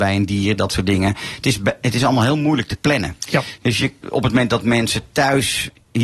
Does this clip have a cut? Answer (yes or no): yes